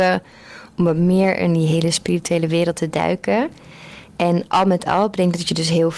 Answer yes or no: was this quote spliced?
no